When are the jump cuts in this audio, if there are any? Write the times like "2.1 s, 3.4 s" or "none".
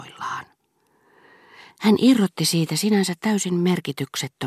none